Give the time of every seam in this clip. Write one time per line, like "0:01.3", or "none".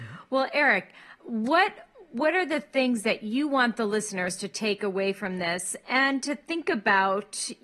0:01.2